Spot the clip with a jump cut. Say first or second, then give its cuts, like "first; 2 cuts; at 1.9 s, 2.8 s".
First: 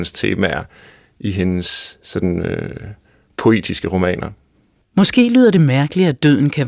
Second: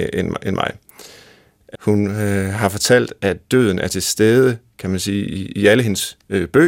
second; 1 cut; at 1.7 s